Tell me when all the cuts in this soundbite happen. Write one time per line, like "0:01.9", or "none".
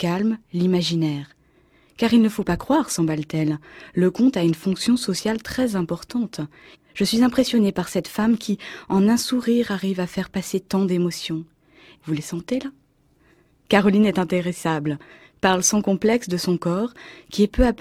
0:06.7
0:11.9